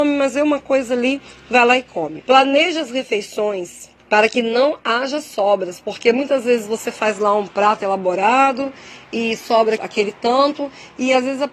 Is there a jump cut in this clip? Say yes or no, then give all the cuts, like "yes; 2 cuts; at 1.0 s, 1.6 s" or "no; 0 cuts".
yes; 3 cuts; at 2.2 s, 4.0 s, 9.8 s